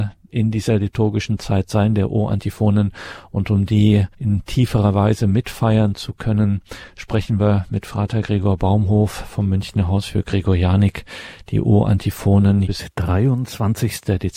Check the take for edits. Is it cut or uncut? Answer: cut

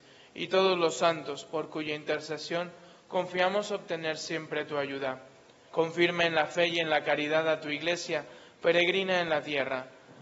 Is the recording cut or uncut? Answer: cut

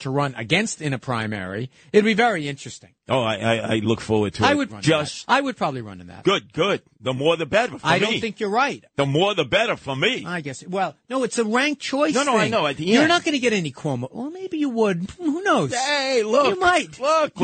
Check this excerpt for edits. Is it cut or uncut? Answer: cut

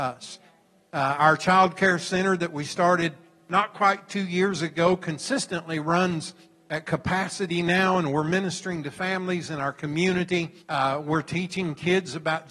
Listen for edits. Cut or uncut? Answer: cut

